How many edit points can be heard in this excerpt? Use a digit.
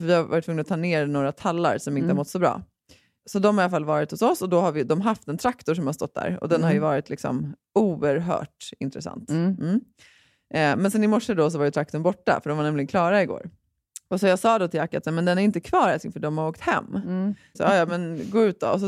1